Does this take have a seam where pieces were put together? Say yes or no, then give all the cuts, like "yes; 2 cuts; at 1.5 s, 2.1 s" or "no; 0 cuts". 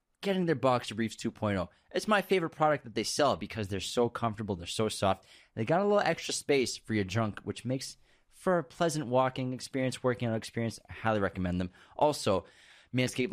no; 0 cuts